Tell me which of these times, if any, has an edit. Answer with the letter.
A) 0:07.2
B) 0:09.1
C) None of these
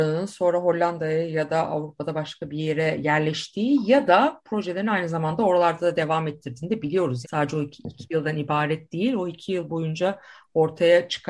A